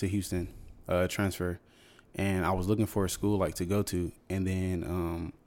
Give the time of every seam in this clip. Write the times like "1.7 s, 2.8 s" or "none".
none